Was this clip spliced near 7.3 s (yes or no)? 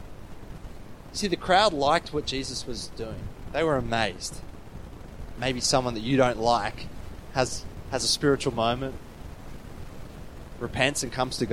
no